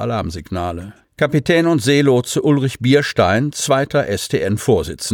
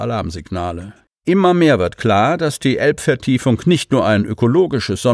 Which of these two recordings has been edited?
second; 1 cut; at 1.1 s

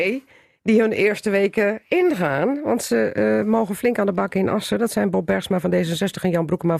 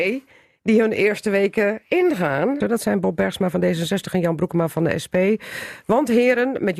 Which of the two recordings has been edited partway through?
second; 1 cut; at 2.6 s

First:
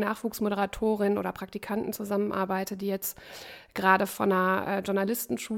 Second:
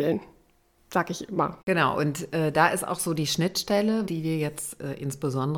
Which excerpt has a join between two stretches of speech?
second; 2 cuts; at 1.6 s, 4.1 s

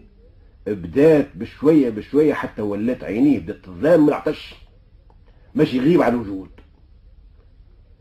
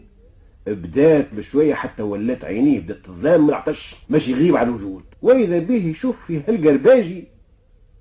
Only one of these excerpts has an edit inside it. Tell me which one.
second; 3 cuts; at 1.3 s, 4.0 s, 5.1 s

